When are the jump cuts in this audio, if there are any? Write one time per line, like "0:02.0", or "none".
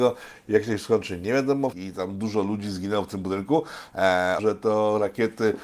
0:01.7
0:04.4